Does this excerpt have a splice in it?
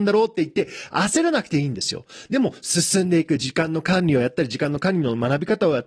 no; 0 cuts

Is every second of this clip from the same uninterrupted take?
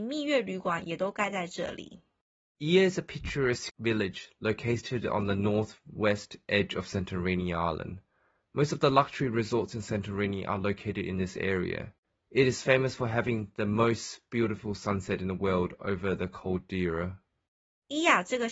yes; 0 cuts

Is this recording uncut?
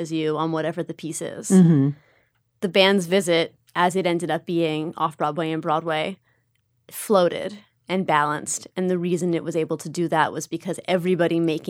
yes; 0 cuts

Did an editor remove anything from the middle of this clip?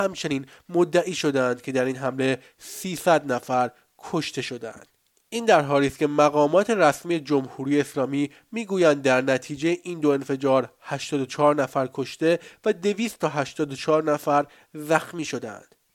no; 0 cuts

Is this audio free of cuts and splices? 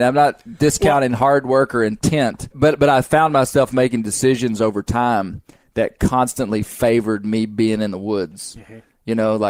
no; 1 cut; at 2.5 s

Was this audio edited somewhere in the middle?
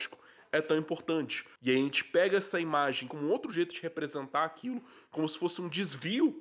yes; 2 cuts; at 1.6 s, 3.1 s

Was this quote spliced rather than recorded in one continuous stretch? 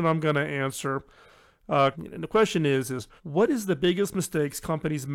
yes; 2 cuts; at 1.9 s, 3.2 s

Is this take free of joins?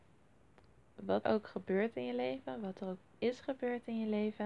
no; 1 cut; at 1.2 s

